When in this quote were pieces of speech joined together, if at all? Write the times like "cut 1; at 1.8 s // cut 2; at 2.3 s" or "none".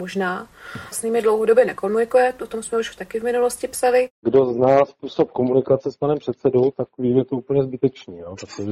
cut 1; at 0.9 s